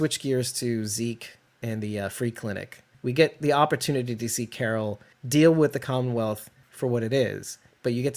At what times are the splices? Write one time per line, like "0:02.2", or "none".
0:02.9